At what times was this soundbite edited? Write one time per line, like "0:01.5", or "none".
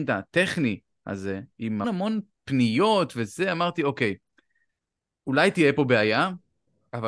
0:01.8